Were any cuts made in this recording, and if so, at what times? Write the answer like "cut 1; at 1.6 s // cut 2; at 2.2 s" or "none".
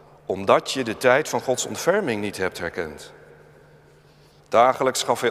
cut 1; at 4.4 s